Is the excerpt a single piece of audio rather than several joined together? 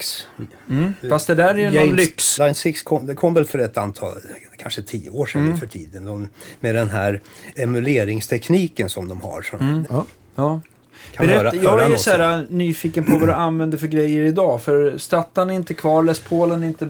no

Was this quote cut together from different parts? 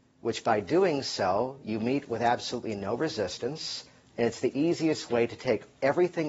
yes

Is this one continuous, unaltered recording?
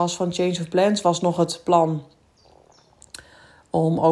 yes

